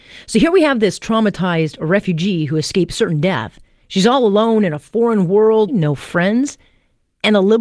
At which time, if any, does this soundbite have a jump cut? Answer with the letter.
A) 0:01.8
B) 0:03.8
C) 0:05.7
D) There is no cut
C